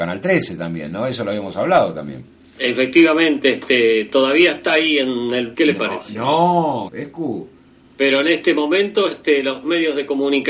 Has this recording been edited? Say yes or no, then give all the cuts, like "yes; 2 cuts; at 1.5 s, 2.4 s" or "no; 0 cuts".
yes; 2 cuts; at 5.5 s, 6.9 s